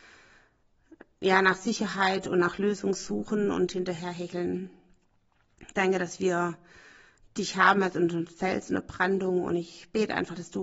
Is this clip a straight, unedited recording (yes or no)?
yes